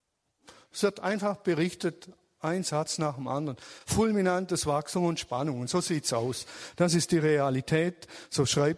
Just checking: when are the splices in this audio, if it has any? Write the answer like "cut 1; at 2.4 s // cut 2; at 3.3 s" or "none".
none